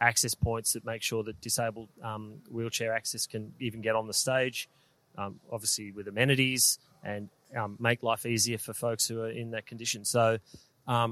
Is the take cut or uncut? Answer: cut